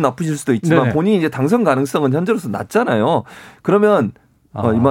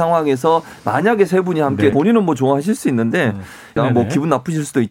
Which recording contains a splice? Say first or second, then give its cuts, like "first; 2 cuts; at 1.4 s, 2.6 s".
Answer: second; 2 cuts; at 1.9 s, 3.8 s